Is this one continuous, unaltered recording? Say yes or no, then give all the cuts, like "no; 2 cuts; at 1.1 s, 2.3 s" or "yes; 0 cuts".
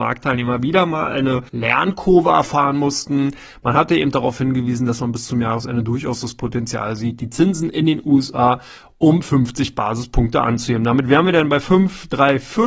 no; 1 cut; at 1.5 s